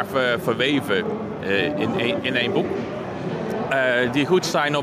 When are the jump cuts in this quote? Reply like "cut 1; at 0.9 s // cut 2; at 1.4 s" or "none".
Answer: cut 1; at 3.7 s